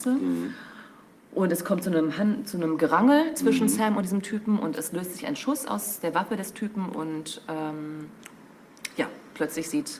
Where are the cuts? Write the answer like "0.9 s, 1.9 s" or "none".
none